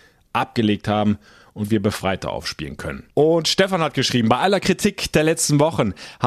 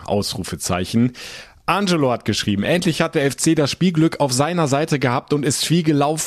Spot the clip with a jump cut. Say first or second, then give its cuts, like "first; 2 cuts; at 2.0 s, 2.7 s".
first; 1 cut; at 3.1 s